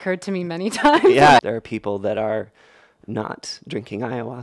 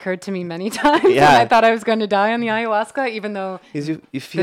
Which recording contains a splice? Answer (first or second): first